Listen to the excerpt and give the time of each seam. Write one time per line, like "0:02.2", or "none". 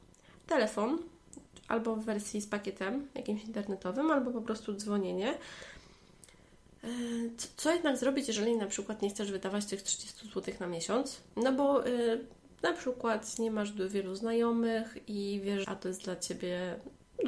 0:11.3
0:15.6